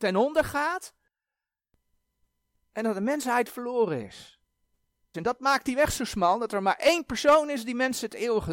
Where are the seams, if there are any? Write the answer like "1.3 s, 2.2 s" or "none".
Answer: 5.1 s